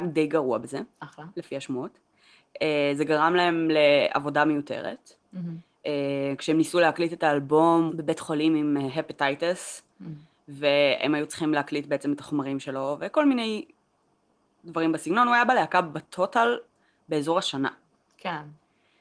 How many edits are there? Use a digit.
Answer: 2